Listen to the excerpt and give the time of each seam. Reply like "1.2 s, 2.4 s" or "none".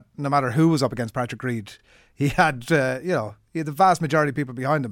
none